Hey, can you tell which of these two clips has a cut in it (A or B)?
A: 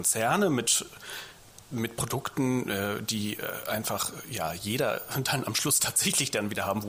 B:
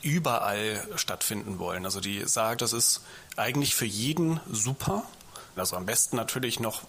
B